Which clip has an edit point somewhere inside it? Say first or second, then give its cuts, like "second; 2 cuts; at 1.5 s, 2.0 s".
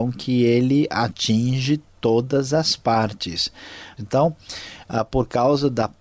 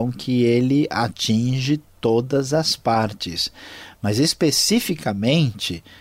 first; 1 cut; at 4.0 s